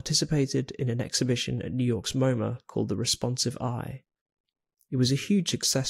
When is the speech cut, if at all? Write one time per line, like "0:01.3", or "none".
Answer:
none